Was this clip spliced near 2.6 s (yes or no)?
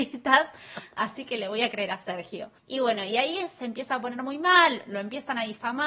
yes